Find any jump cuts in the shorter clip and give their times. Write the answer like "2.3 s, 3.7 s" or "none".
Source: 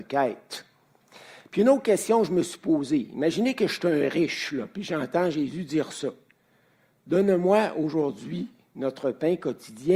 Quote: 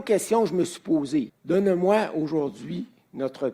1.3 s